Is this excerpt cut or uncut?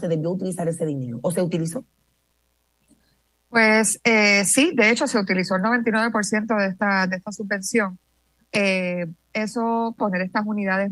cut